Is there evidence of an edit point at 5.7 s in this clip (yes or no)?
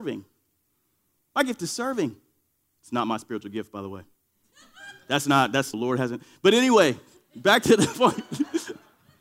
yes